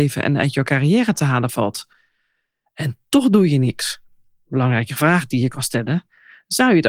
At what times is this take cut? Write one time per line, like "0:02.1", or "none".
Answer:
none